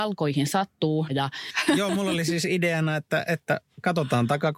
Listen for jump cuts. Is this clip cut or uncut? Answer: cut